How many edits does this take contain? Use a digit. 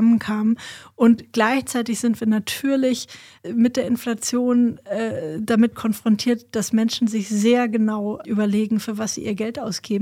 1